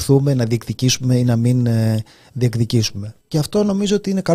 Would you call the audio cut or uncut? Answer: cut